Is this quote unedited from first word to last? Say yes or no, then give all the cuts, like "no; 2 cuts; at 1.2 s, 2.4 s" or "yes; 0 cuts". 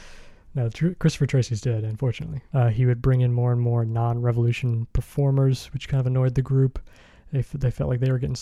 no; 1 cut; at 2.5 s